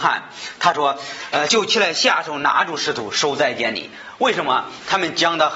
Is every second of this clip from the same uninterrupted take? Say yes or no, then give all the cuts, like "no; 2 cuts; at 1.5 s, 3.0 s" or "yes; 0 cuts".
yes; 0 cuts